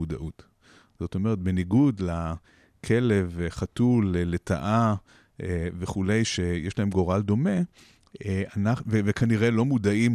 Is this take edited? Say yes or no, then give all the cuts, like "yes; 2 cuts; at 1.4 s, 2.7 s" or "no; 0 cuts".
no; 0 cuts